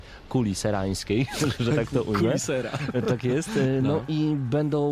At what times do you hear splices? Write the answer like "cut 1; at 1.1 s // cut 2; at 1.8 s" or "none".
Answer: none